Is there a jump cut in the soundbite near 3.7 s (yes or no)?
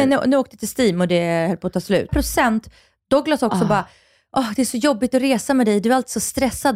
no